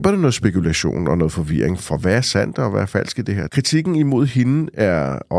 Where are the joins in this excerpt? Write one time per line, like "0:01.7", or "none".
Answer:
0:01.8
0:03.5

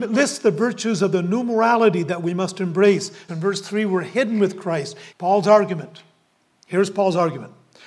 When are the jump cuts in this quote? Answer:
0:03.3
0:05.1

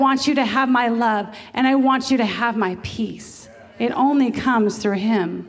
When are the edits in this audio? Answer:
none

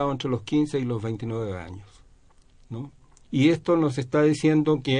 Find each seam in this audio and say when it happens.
0:03.2

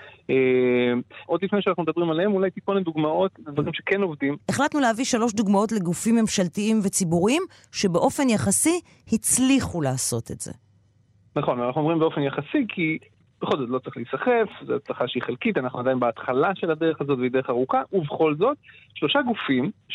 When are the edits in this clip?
0:01.3
0:04.4

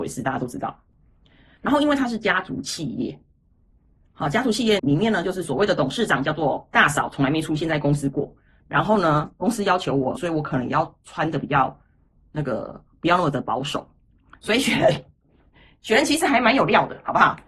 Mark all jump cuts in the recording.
0:04.8
0:08.6
0:10.2

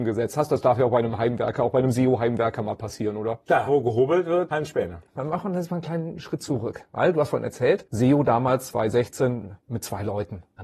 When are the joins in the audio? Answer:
0:03.7

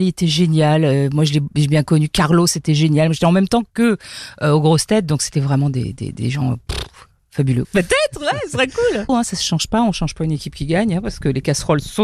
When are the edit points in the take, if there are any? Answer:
0:07.6
0:09.1

